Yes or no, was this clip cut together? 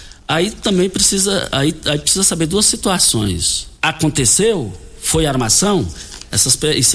yes